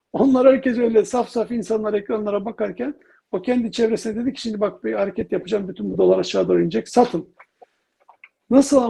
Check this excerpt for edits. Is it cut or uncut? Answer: uncut